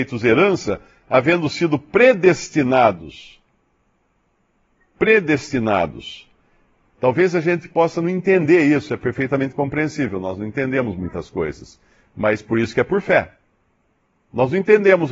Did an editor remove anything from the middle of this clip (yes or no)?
yes